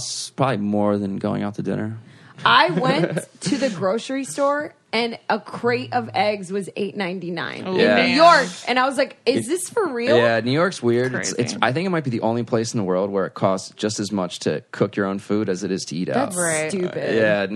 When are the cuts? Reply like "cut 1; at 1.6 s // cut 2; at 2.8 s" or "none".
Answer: none